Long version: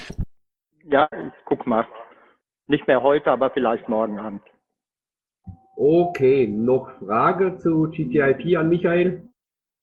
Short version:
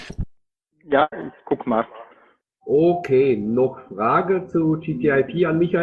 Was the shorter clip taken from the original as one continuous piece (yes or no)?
no